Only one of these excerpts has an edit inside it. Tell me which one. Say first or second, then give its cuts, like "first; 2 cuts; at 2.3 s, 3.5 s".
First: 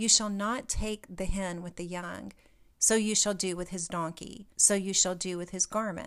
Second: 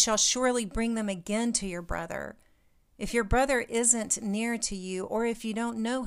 first; 2 cuts; at 2.7 s, 4.5 s